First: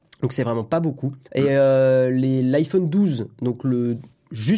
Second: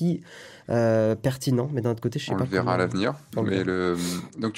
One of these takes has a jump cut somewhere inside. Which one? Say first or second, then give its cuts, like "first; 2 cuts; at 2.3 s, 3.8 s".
first; 1 cut; at 1.2 s